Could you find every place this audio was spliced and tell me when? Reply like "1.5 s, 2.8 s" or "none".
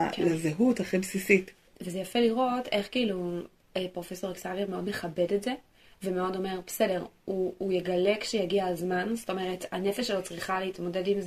none